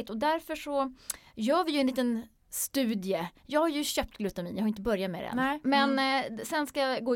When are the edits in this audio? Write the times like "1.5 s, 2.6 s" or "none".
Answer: 5.6 s

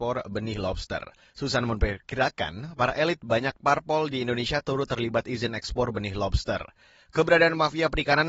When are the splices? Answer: none

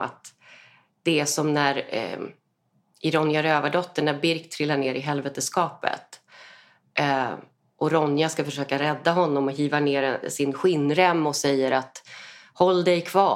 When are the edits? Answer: none

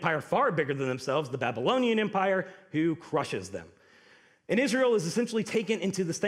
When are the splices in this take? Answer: none

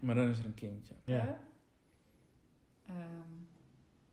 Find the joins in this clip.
1.1 s

